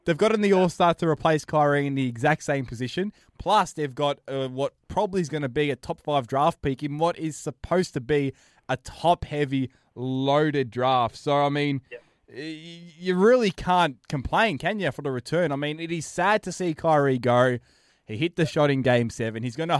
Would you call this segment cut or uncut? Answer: uncut